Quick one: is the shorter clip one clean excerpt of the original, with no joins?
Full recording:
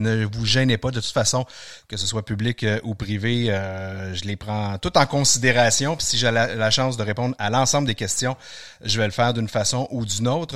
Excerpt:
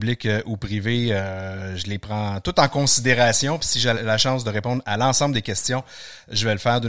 no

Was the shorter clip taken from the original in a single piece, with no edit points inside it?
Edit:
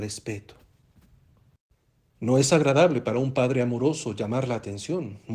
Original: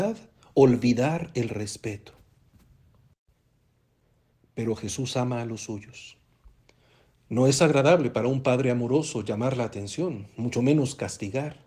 no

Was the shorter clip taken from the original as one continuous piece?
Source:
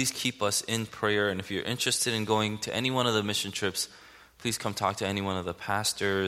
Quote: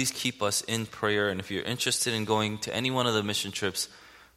yes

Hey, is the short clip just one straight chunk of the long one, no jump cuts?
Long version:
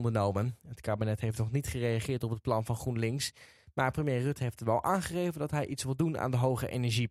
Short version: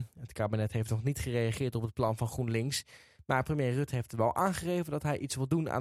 yes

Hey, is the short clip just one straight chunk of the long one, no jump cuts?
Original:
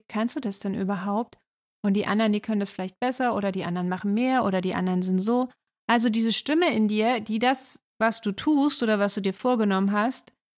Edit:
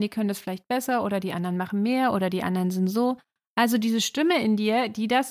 yes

